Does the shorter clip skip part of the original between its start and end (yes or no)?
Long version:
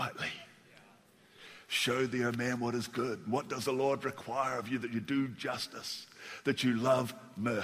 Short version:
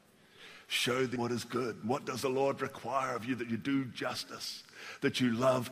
yes